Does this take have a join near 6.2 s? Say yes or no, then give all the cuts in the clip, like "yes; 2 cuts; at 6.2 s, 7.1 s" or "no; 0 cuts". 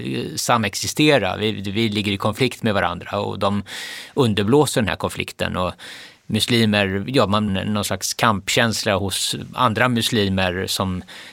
no; 1 cut; at 7.5 s